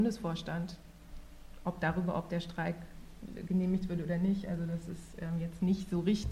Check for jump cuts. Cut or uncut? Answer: uncut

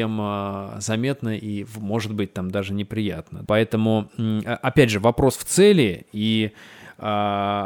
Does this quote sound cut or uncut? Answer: cut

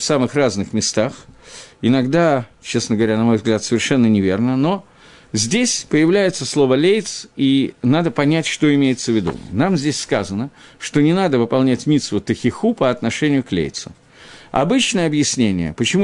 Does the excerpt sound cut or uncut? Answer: uncut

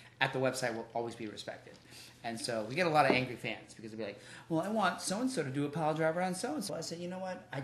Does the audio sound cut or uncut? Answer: cut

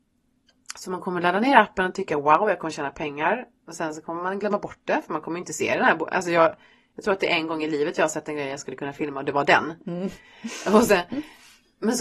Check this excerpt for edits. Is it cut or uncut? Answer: uncut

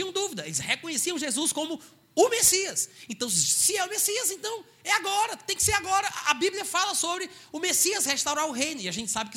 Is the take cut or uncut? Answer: uncut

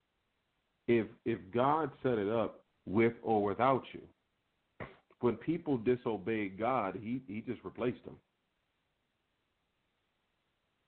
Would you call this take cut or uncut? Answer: cut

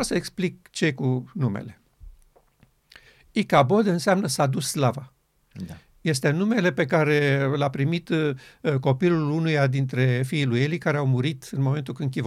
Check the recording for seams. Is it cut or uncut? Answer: uncut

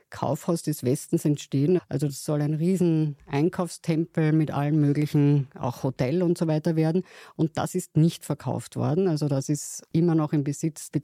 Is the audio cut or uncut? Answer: cut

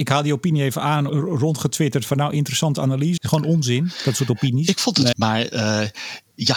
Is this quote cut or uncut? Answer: cut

